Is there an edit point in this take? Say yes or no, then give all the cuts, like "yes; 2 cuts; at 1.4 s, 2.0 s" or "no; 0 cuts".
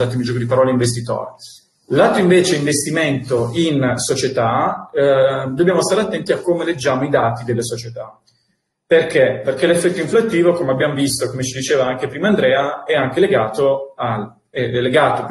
no; 0 cuts